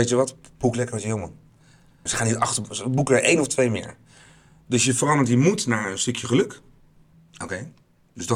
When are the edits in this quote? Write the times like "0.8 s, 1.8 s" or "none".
2.1 s, 7.1 s